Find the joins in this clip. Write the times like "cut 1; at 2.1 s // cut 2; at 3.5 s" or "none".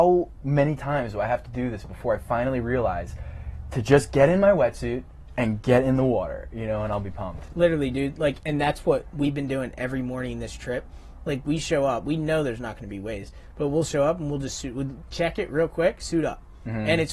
none